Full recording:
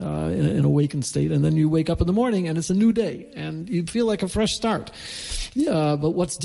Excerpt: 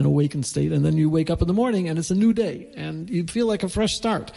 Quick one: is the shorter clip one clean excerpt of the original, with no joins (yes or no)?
yes